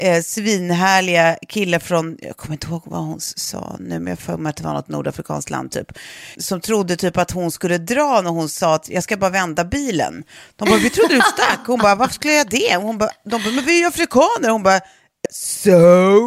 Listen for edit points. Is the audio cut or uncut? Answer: cut